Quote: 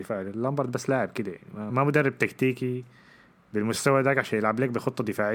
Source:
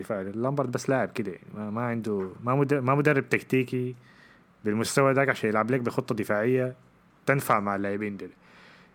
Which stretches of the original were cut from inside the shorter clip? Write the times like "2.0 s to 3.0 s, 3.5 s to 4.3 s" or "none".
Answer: 1.7 s to 2.8 s